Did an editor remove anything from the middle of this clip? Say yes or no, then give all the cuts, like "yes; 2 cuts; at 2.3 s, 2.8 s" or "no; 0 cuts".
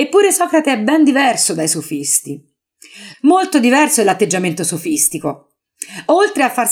yes; 1 cut; at 3.1 s